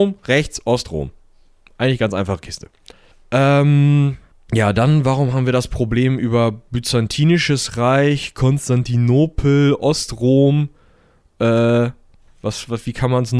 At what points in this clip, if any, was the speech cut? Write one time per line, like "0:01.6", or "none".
none